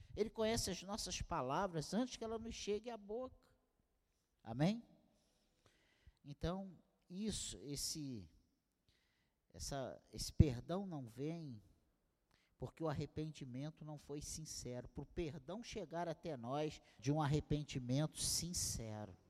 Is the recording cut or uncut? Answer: cut